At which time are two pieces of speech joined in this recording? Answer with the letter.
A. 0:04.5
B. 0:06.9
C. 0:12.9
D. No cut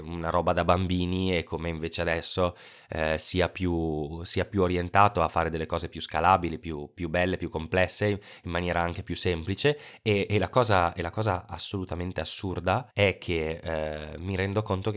C